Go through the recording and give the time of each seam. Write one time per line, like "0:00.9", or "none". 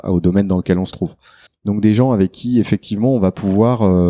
0:01.5